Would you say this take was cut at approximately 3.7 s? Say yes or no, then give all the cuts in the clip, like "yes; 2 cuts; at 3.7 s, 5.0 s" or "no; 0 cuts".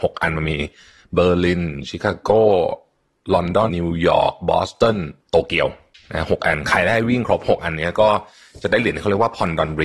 yes; 2 cuts; at 3.7 s, 5.2 s